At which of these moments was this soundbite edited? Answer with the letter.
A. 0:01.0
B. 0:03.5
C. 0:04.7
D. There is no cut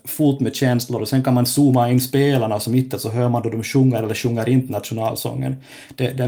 D